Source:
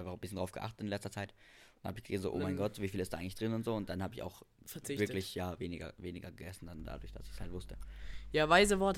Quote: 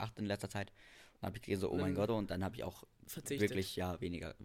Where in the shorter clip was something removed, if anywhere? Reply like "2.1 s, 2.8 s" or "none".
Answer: 2.1 s